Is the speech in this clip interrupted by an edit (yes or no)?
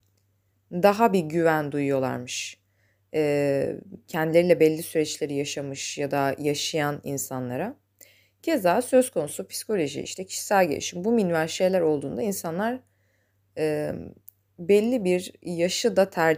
no